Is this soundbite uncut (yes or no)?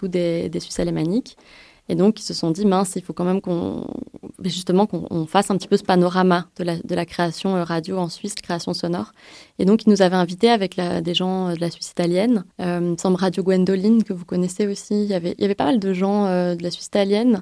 no